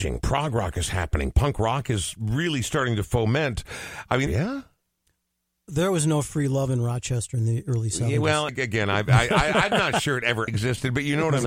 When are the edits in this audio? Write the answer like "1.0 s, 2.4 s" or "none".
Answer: 4.3 s, 8.5 s, 10.5 s

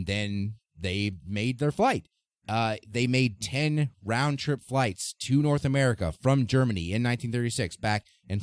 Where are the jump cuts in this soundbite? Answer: 2.3 s

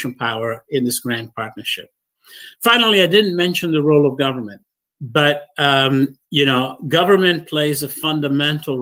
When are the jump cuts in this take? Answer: none

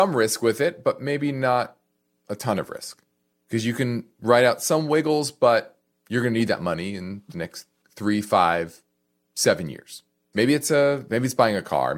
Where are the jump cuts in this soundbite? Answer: 10.3 s

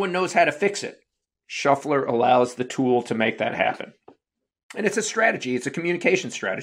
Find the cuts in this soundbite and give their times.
none

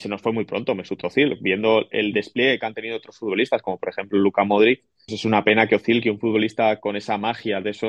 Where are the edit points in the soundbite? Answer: 5.1 s

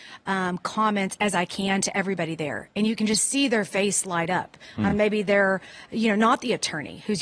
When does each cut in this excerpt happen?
none

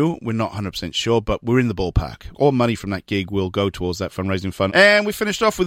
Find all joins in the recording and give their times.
2.3 s, 4.7 s

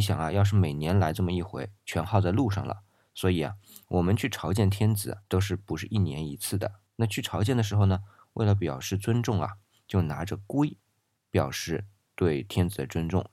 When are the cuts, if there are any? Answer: 1.8 s

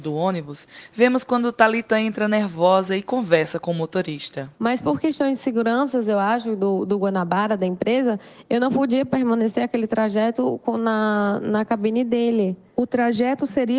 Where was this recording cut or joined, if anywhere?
4.6 s

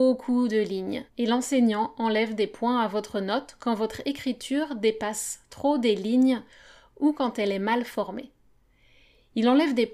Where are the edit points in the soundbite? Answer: 1.1 s

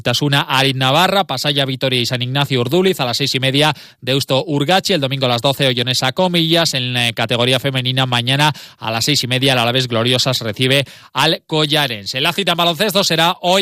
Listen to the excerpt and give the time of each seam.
none

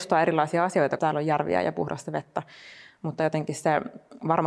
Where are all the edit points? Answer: 1.0 s

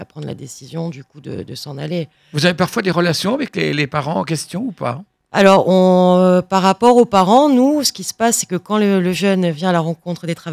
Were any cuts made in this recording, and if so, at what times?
none

